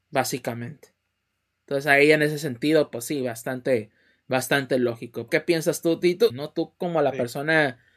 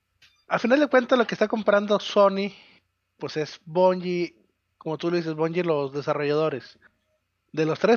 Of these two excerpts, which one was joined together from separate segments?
first; 2 cuts; at 5.3 s, 6.3 s

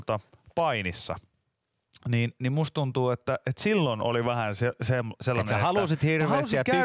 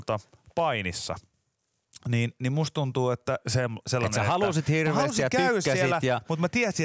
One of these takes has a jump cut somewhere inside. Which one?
second; 1 cut; at 3.4 s

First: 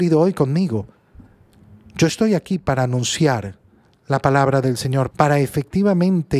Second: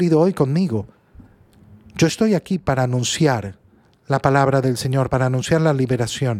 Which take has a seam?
first; 1 cut; at 5.1 s

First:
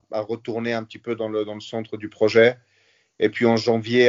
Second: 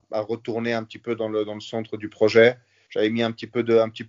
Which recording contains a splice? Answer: second; 1 cut; at 2.9 s

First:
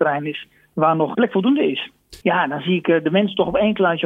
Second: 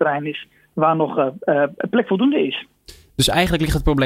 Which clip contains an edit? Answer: first; 2 cuts; at 1.1 s, 2.2 s

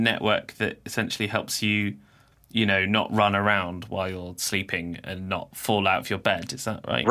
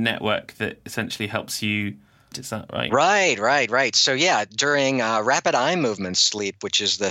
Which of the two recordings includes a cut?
second; 1 cut; at 2.3 s

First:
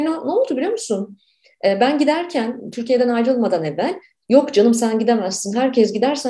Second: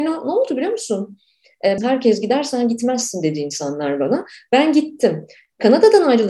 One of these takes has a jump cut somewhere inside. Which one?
second; 1 cut; at 1.8 s

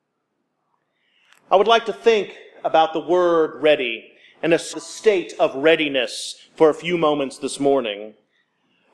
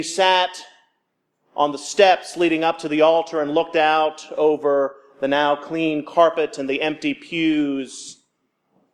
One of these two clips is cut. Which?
first; 1 cut; at 4.7 s

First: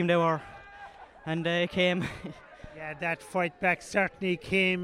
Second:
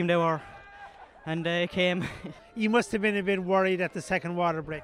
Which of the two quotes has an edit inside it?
second; 1 cut; at 2.4 s

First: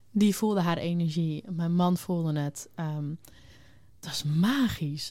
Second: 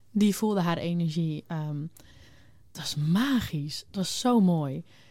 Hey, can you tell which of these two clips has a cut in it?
second; 1 cut; at 1.4 s

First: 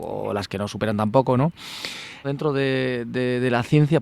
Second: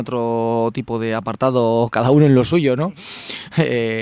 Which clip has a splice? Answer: first; 1 cut; at 2.2 s

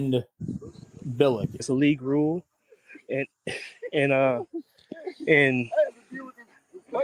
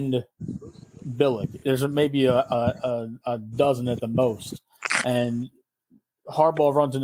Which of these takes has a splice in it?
first; 1 cut; at 1.6 s

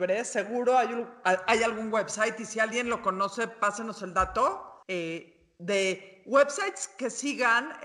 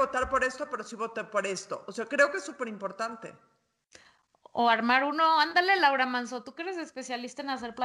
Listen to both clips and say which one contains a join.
first; 2 cuts; at 1.2 s, 4.8 s

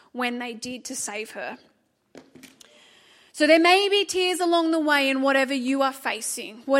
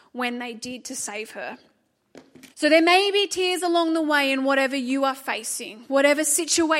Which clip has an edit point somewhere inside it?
second; 1 cut; at 2.5 s

